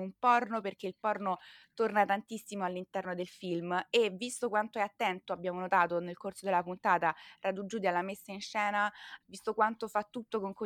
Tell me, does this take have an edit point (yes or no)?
yes